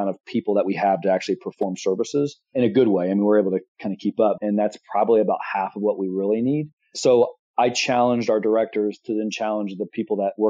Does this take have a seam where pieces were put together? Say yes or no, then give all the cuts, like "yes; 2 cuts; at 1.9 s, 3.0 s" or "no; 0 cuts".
yes; 1 cut; at 4.4 s